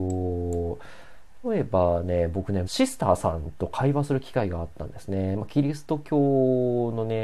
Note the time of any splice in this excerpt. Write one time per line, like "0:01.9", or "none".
0:01.4
0:02.6